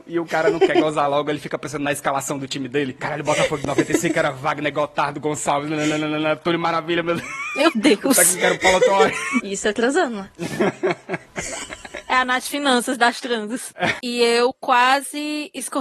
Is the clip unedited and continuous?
no; 2 cuts; at 9.4 s, 14.0 s

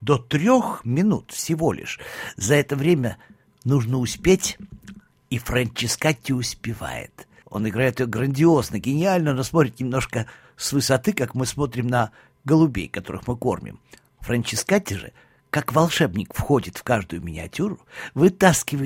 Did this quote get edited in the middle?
yes; 1 cut; at 7.4 s

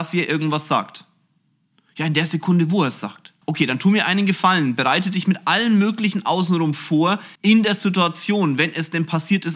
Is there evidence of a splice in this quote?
yes; 2 cuts; at 3.4 s, 7.4 s

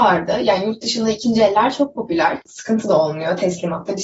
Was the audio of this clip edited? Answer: yes; 1 cut; at 2.4 s

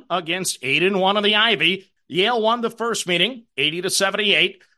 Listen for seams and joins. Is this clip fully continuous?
no; 1 cut; at 2.0 s

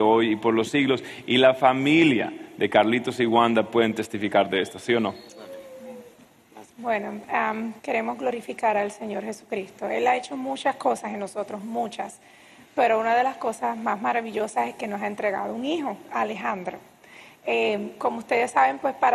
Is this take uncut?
no; 2 cuts; at 6.7 s, 7.8 s

